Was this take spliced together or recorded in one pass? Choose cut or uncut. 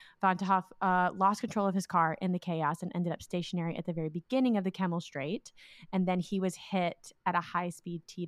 uncut